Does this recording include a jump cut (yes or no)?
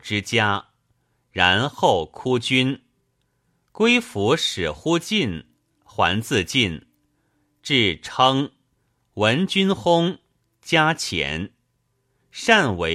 no